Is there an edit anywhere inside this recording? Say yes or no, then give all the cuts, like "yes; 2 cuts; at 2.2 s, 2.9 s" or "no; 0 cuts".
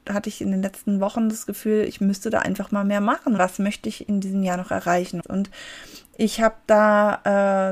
yes; 2 cuts; at 3.4 s, 5.2 s